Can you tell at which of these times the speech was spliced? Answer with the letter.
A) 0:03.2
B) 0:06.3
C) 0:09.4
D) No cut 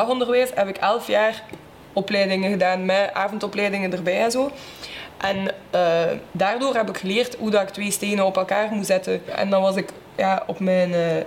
B